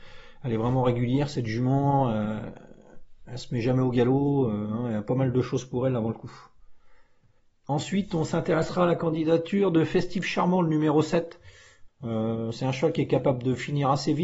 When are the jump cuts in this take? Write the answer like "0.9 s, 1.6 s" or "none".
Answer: 11.9 s